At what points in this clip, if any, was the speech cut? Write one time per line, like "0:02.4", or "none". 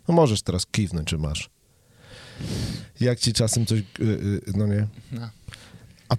none

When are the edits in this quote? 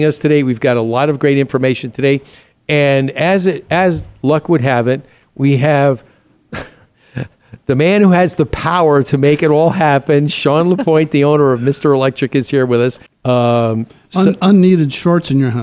0:13.1

